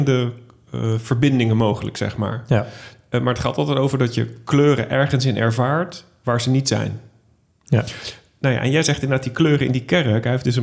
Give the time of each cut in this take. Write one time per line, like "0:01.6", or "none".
none